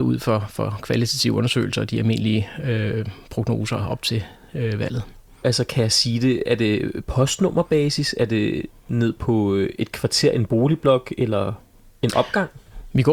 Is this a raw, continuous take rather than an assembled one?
no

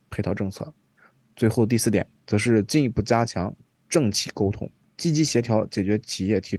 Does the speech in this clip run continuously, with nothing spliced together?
no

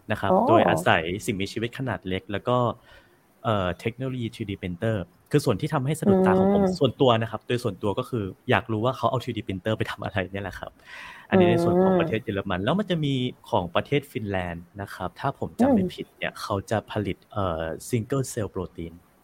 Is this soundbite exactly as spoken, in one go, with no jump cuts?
no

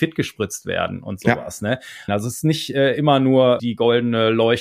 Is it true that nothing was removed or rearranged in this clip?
no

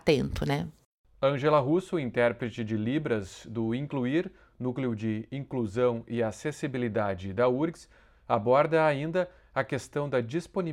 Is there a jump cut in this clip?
no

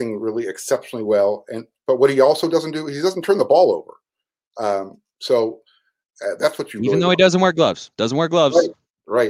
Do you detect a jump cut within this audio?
no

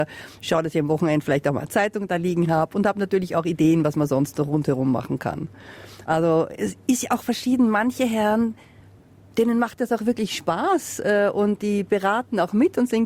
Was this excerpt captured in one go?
yes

